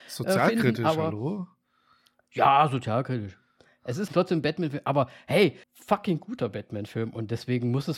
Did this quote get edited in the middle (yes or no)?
yes